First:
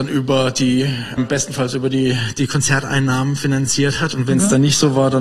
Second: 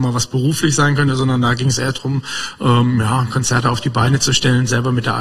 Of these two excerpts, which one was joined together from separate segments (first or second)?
first